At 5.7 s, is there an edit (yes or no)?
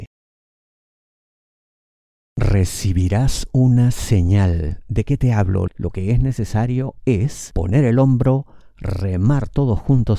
yes